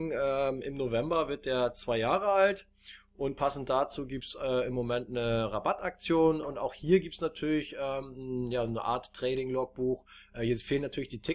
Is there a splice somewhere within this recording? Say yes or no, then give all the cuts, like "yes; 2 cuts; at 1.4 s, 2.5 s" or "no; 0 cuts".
yes; 1 cut; at 6.4 s